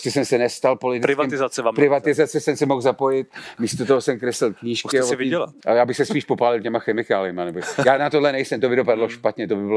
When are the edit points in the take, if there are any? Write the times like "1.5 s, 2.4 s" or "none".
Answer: 5.6 s